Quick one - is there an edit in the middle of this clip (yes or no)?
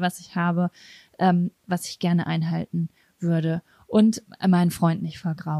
no